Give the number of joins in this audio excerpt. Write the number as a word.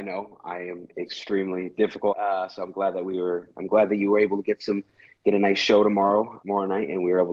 two